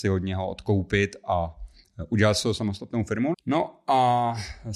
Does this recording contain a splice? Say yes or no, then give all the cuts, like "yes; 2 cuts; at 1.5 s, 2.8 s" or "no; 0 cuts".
yes; 1 cut; at 3.3 s